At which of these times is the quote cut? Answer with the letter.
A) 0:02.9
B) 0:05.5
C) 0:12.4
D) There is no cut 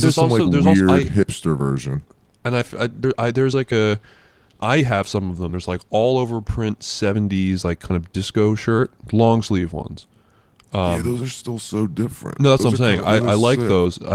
D